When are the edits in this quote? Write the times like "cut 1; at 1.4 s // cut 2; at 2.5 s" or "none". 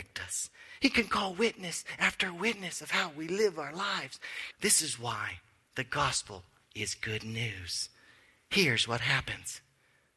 cut 1; at 4.5 s